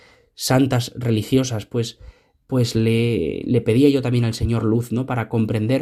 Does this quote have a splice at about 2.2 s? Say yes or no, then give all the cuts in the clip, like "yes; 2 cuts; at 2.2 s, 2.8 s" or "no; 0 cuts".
no; 0 cuts